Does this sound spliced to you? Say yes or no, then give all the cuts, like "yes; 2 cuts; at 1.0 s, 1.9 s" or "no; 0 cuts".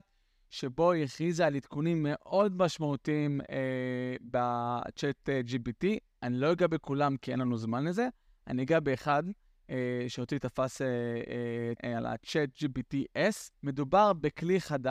yes; 2 cuts; at 11.8 s, 13.5 s